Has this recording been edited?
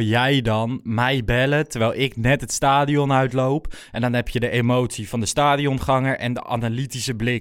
no; 0 cuts

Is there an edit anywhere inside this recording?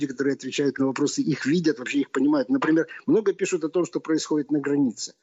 no; 0 cuts

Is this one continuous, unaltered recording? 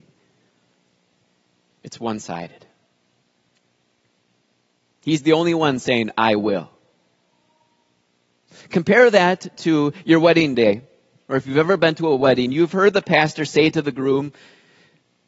yes; 0 cuts

